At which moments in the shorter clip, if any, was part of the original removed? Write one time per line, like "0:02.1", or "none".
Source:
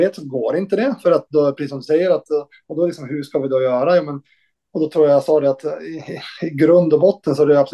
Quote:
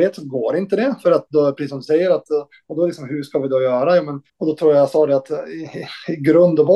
0:04.3